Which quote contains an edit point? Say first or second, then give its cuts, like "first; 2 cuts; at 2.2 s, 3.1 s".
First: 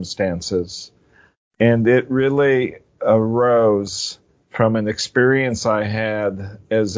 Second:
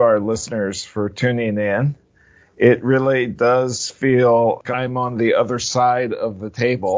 second; 1 cut; at 4.6 s